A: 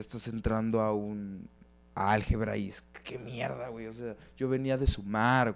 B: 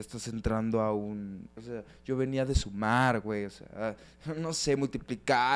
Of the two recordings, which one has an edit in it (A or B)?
B